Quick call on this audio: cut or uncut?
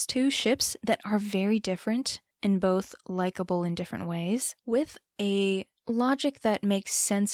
cut